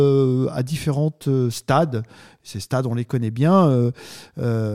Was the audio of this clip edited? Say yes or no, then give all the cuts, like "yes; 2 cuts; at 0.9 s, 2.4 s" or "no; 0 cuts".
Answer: no; 0 cuts